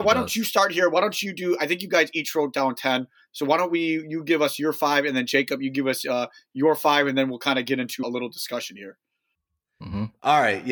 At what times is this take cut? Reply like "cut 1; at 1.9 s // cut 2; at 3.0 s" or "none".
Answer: cut 1; at 8.0 s